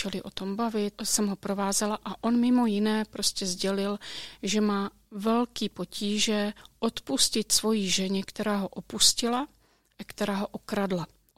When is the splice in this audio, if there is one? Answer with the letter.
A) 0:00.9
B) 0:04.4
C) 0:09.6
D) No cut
A